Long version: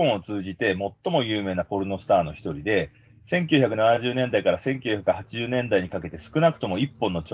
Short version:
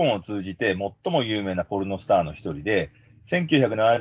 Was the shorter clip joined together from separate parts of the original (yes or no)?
no